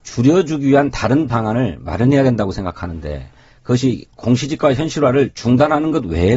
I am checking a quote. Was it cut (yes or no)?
no